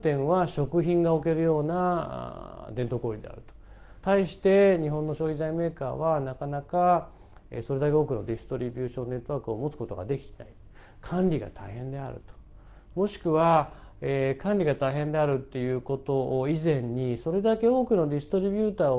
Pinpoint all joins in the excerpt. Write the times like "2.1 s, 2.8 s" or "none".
4.0 s